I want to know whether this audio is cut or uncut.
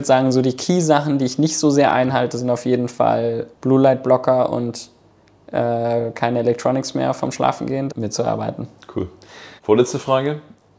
cut